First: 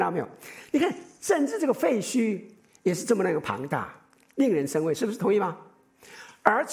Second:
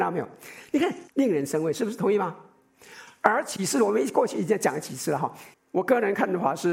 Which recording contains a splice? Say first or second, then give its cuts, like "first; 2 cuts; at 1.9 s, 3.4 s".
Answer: second; 2 cuts; at 1.1 s, 5.5 s